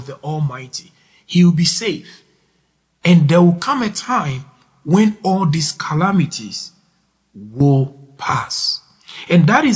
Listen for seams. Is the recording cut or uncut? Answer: uncut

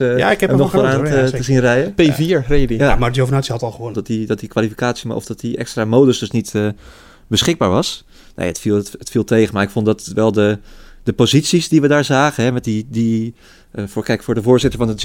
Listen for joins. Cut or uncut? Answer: cut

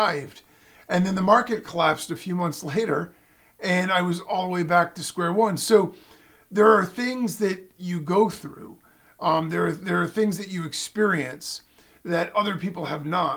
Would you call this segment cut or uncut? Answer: uncut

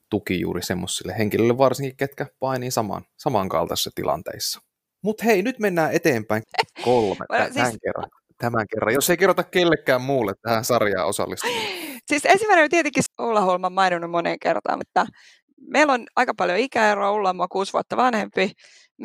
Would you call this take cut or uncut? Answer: cut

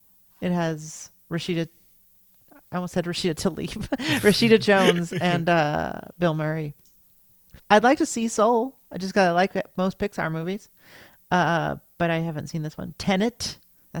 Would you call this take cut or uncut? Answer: cut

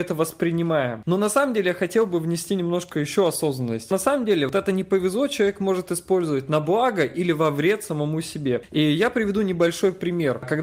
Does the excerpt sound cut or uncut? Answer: uncut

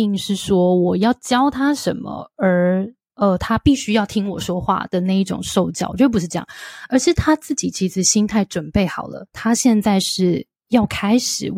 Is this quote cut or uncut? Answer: uncut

